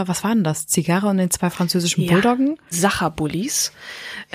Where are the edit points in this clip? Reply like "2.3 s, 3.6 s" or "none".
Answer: 2.7 s